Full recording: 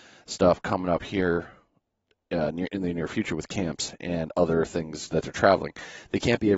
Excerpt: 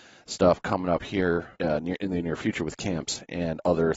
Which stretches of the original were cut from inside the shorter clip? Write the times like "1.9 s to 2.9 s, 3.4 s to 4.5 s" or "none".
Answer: 1.5 s to 2.3 s